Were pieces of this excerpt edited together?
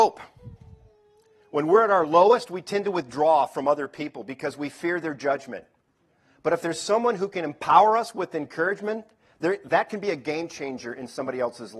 no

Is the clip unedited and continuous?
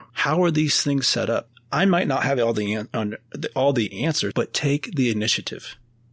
no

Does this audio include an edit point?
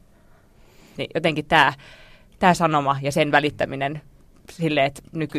yes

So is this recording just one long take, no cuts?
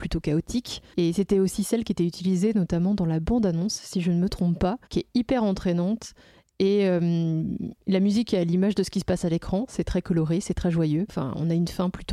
no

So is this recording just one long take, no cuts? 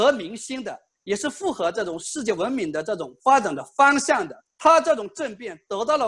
no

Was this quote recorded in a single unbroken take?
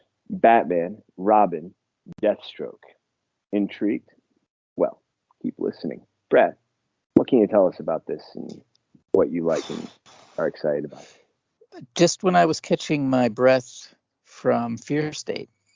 yes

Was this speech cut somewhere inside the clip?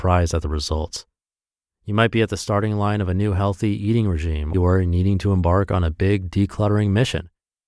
yes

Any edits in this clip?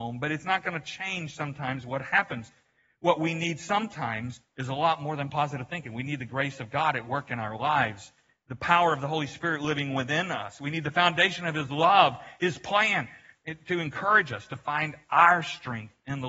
no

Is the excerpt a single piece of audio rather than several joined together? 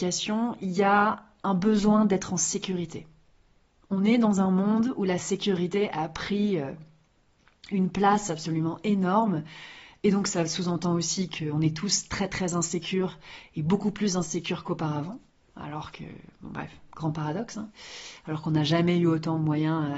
yes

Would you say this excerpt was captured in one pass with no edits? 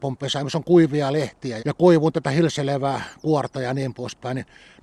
no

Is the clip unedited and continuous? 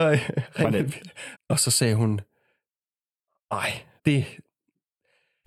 no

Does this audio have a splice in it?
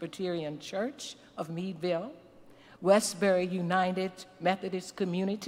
no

